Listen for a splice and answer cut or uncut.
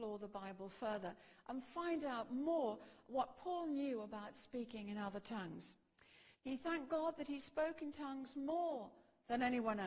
cut